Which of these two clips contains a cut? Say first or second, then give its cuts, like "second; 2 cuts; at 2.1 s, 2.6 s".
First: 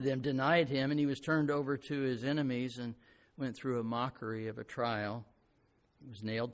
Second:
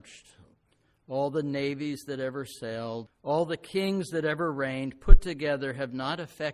second; 1 cut; at 3.1 s